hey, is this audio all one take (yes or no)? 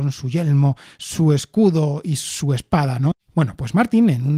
no